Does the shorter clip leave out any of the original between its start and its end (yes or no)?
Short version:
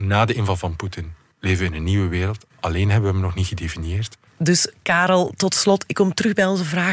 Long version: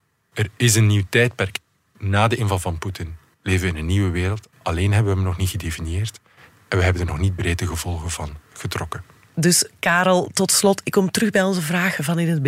yes